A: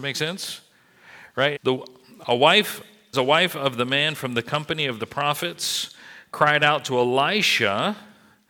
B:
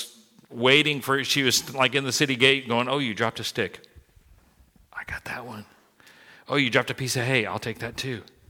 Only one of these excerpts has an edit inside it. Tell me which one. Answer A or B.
A